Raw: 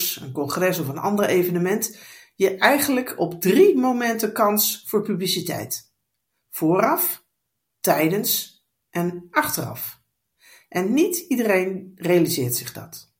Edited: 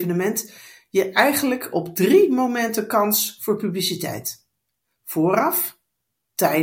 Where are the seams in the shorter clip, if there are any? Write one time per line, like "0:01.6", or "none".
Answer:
none

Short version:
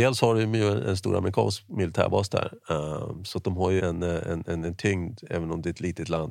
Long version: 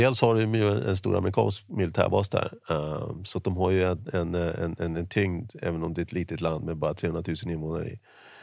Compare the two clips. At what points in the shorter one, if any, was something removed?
0:03.8

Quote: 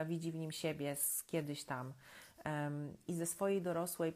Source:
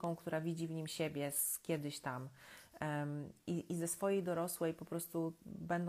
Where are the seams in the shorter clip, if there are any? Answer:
0:03.1

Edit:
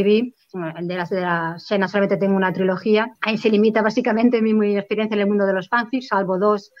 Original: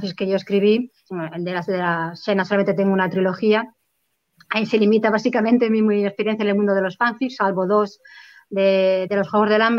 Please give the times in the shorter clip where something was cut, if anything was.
0:03.2

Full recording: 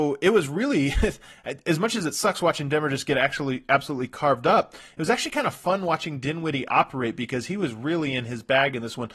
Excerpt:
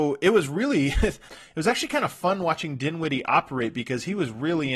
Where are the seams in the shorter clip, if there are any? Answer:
0:01.3

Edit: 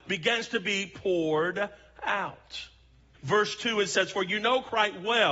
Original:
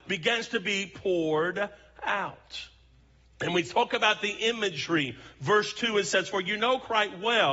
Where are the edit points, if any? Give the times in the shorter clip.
0:03.1

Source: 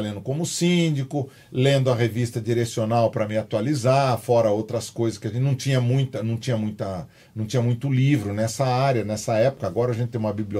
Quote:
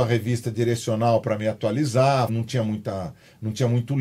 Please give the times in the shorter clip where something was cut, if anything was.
0:02.3

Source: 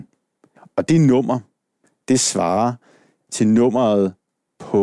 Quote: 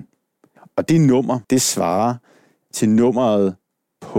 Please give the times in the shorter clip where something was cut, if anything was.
0:01.4

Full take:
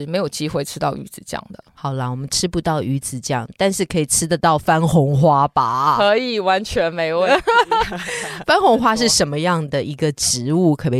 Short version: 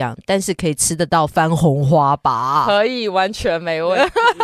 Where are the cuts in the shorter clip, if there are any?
none

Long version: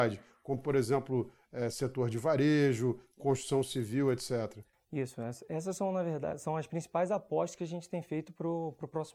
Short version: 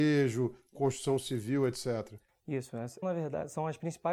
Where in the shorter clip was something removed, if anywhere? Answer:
0:03.0

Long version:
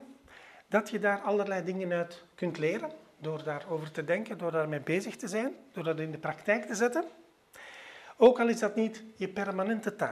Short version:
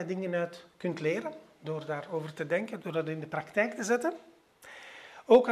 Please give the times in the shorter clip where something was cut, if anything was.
0:02.8

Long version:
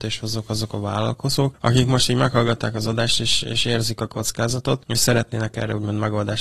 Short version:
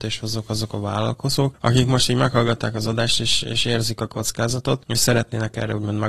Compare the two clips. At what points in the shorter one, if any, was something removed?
none

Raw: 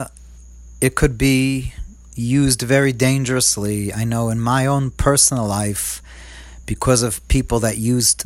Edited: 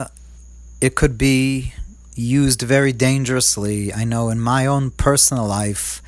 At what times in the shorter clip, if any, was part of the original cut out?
none

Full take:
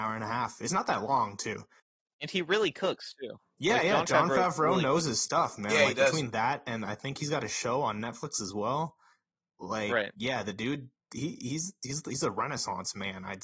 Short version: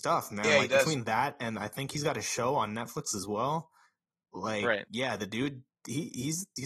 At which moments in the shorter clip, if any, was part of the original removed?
none

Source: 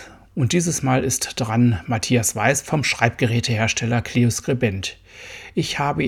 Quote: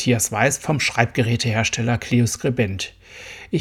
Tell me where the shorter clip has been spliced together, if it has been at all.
none

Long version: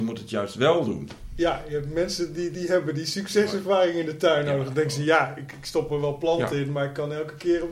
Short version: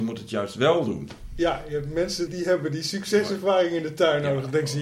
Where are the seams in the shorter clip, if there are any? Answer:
0:02.3

